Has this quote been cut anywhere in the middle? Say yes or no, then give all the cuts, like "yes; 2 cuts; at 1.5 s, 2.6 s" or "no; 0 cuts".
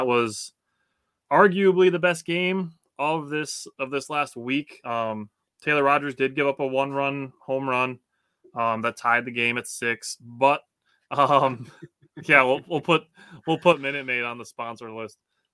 no; 0 cuts